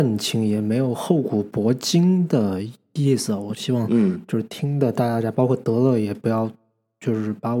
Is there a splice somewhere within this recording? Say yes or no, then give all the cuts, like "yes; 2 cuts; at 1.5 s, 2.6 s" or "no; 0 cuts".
no; 0 cuts